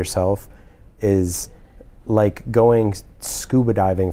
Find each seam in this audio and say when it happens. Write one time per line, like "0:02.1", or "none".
none